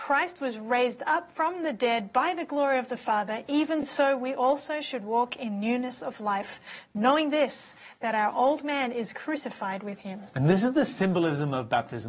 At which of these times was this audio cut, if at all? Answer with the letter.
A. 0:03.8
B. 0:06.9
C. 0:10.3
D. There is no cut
D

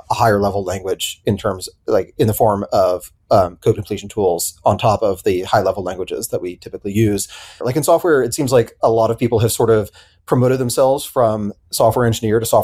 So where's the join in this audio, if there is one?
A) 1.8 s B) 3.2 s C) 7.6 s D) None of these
C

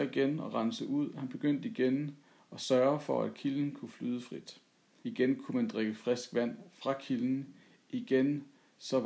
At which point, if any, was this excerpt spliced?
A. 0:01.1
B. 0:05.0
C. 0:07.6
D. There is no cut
B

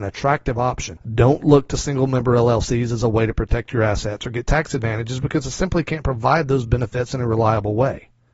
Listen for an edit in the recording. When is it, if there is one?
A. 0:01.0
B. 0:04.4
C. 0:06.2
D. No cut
A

